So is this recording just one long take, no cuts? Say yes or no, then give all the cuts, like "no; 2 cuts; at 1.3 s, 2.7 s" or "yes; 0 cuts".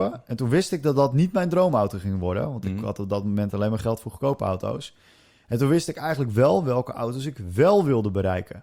yes; 0 cuts